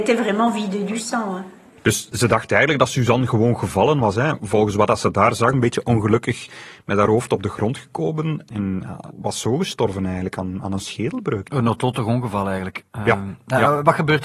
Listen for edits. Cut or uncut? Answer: cut